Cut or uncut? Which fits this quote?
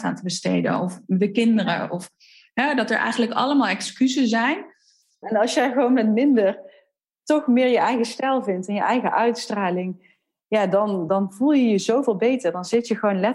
cut